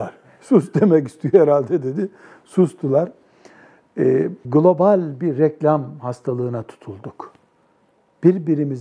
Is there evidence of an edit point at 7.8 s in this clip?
no; 1 cut; at 4.4 s

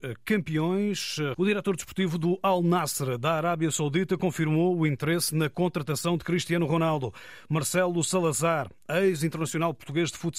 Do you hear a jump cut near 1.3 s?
yes; 1 cut; at 1.3 s

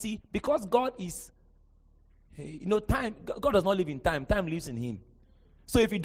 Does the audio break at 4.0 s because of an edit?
no; 0 cuts

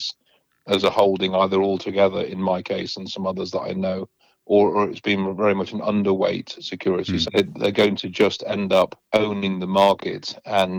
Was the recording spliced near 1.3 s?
no; 2 cuts; at 7.2 s, 9.0 s

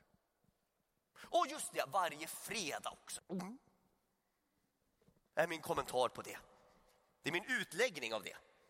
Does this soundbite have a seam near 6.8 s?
no; 1 cut; at 3.2 s

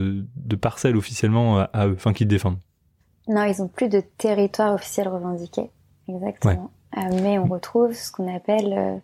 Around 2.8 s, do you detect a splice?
no; 0 cuts

